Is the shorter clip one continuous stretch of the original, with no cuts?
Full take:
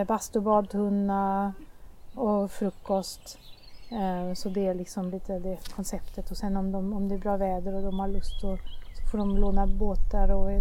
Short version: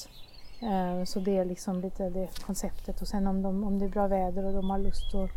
yes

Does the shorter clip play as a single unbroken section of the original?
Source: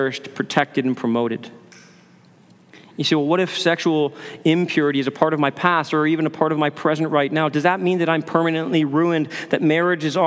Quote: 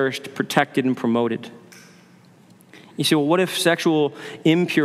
yes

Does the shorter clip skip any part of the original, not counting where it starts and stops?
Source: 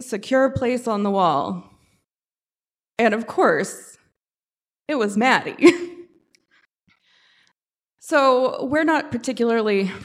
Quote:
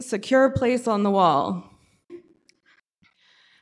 yes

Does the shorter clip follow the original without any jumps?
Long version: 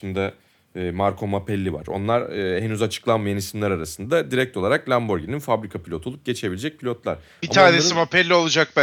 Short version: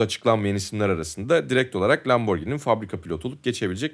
yes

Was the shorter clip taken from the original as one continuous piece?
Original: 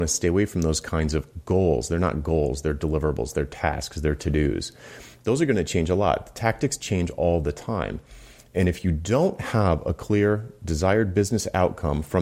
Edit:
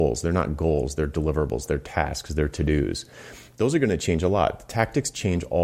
yes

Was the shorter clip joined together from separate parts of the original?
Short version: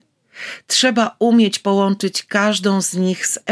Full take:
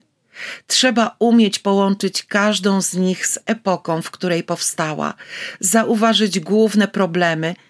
no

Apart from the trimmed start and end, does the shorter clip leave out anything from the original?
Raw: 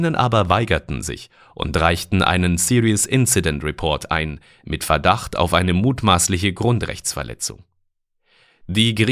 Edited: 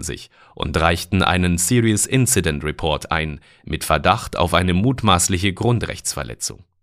no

